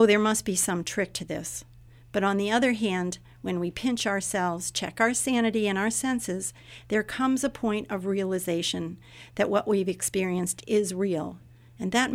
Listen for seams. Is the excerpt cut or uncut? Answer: uncut